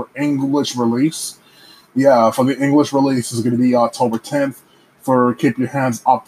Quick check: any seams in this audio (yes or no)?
no